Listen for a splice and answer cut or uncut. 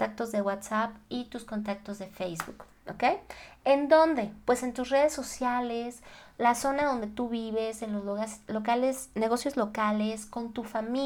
uncut